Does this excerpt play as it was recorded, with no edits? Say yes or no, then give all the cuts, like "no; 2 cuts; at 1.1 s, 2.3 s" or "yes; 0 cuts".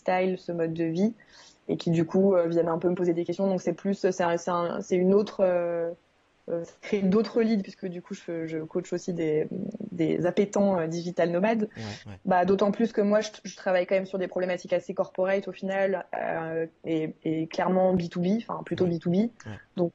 no; 1 cut; at 12.0 s